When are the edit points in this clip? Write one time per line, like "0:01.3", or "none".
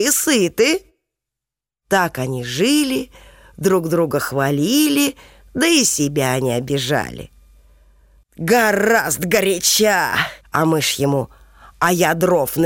0:08.2
0:10.4